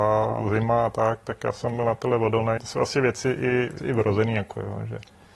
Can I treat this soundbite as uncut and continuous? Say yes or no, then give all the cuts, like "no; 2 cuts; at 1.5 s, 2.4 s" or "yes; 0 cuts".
no; 2 cuts; at 2.6 s, 3.8 s